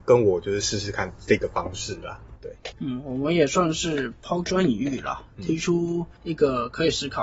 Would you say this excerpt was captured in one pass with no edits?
no; 1 cut; at 2.4 s

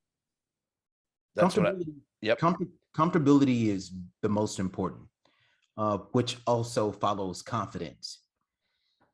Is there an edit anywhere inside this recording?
no; 0 cuts

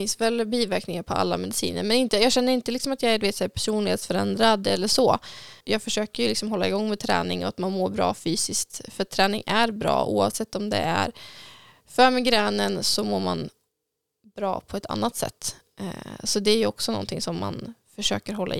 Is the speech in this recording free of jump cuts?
no; 1 cut; at 5.6 s

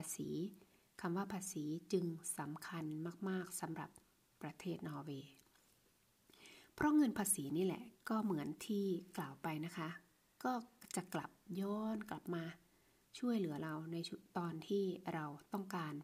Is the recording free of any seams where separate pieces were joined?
yes; 0 cuts

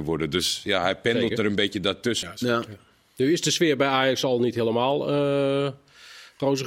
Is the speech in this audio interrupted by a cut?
yes; 1 cut; at 2.2 s

